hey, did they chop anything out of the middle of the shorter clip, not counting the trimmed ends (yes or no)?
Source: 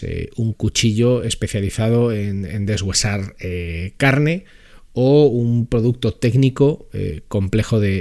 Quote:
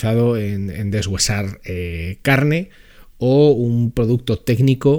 no